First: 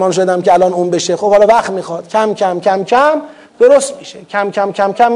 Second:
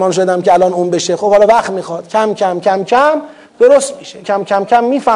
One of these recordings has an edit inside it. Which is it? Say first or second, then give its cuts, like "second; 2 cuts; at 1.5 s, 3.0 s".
second; 1 cut; at 4.2 s